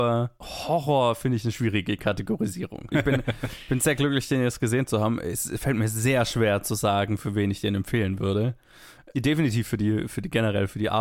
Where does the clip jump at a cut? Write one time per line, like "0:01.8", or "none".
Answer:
0:02.9

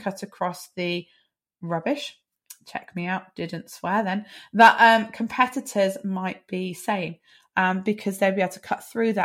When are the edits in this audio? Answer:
none

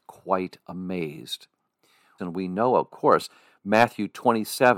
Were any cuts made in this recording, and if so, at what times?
0:02.2

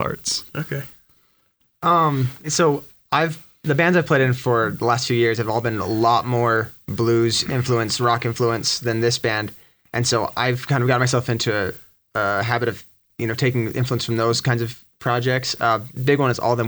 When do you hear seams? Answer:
0:02.4

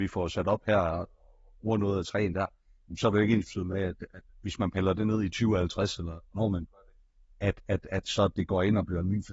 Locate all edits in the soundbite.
none

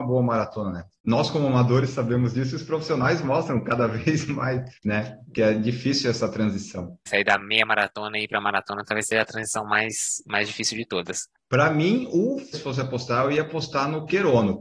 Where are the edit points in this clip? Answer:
0:07.1
0:11.4
0:12.5

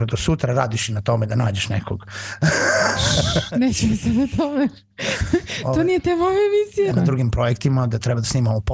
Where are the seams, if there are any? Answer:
0:06.9

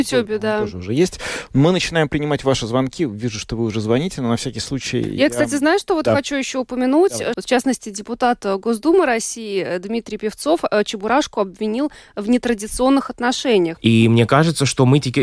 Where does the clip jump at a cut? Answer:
0:07.3
0:13.8

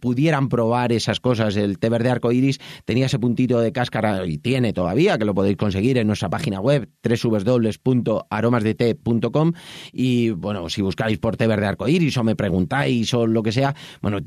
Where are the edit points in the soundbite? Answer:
none

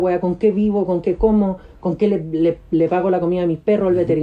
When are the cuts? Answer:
none

